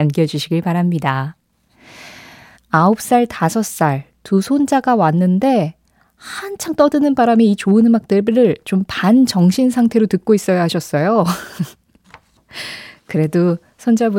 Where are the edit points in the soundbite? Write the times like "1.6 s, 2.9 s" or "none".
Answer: 2.5 s